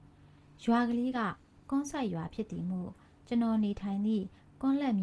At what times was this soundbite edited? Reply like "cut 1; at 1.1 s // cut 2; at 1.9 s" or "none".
none